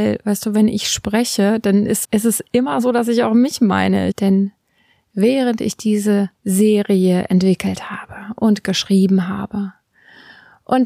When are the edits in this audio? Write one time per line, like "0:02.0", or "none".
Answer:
0:02.0
0:04.1
0:06.3